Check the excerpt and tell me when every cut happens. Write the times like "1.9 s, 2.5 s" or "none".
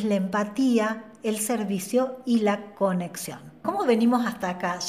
3.6 s

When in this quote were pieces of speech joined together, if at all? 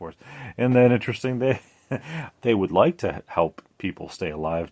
none

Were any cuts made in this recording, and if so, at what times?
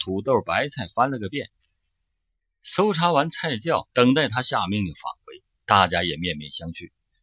3.9 s, 5.6 s

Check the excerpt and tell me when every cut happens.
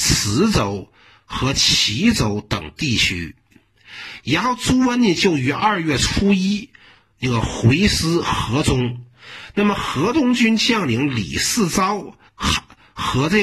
12.3 s

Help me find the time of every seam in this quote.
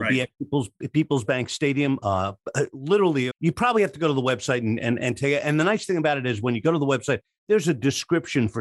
3.3 s

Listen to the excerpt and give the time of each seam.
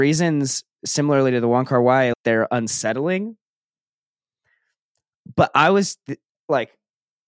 2.1 s

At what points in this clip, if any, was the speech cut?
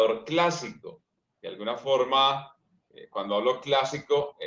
none

